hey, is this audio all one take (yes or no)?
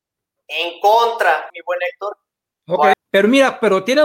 no